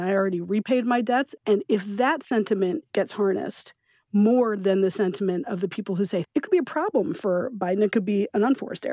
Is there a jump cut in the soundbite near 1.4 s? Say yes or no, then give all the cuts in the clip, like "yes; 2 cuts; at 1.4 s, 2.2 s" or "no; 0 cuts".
yes; 2 cuts; at 1.4 s, 6.2 s